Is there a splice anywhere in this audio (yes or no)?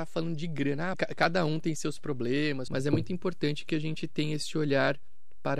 yes